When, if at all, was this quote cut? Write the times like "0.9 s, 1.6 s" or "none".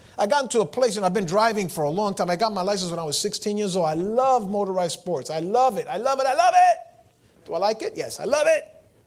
none